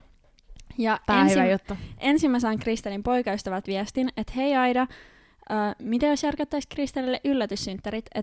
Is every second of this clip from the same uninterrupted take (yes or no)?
yes